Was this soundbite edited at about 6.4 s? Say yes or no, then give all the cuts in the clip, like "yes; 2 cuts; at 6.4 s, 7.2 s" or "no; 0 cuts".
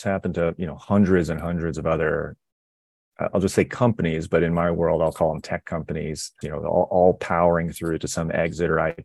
yes; 1 cut; at 6.4 s